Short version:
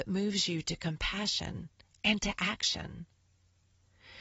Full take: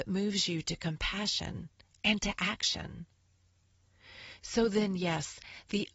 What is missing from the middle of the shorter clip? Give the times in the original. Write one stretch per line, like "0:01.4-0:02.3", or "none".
none